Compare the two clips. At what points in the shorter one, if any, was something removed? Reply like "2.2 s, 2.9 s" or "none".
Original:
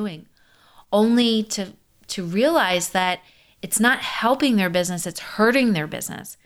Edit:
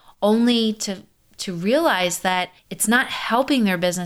2.6 s